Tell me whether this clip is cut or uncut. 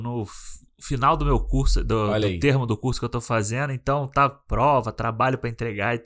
uncut